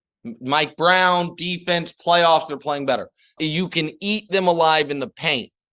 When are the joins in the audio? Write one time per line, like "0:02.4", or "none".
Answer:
0:03.4